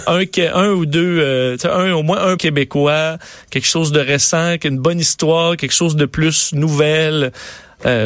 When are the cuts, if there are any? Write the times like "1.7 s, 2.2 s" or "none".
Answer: 2.4 s